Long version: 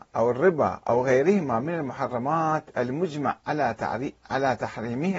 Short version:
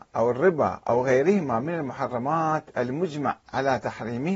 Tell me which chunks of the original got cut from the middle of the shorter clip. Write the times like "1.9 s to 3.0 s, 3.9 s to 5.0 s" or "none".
3.4 s to 4.2 s

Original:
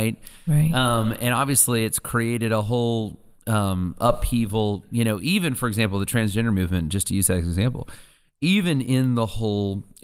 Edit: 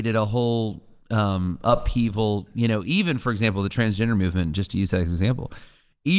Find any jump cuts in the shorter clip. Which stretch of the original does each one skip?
none

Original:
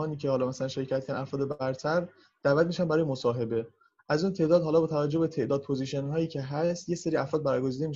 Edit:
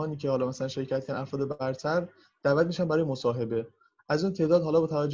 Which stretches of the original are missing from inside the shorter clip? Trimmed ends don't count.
none

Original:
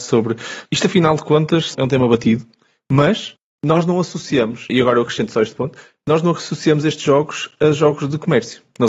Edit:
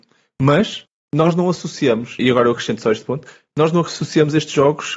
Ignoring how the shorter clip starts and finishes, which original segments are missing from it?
none

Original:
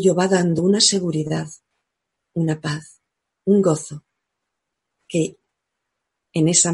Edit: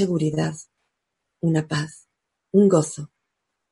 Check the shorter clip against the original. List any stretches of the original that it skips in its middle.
none

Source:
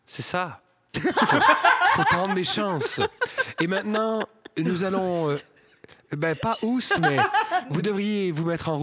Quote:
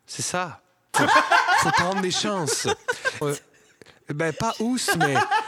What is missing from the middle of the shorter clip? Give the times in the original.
0.9 s to 1.3 s, 3.5 s to 5.2 s

